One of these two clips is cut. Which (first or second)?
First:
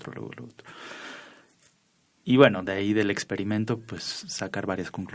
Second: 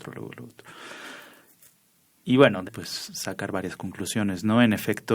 second